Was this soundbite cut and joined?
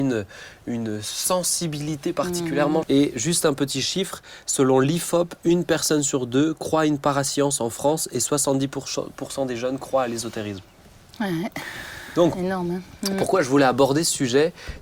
yes; 1 cut; at 2.8 s

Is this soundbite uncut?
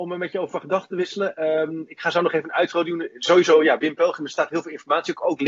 yes; 0 cuts

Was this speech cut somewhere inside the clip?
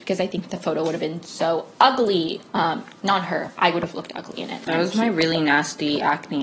yes; 1 cut; at 4.7 s

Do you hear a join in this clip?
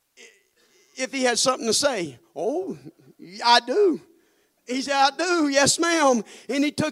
no; 0 cuts

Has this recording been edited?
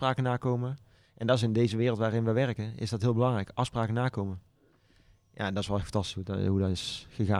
no; 0 cuts

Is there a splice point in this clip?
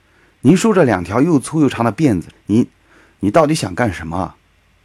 yes; 1 cut; at 2.3 s

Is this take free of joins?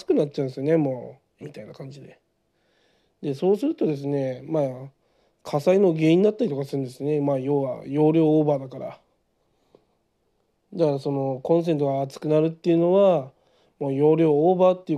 no; 1 cut; at 1.4 s

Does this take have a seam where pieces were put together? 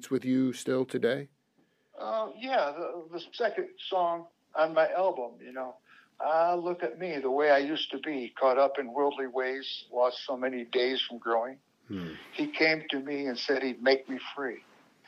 no; 0 cuts

